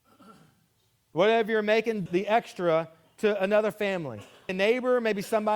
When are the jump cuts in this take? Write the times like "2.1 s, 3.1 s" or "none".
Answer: 2.1 s, 4.5 s